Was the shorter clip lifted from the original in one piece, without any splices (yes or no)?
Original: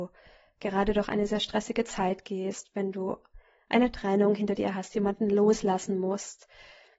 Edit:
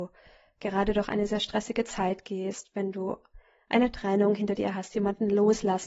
yes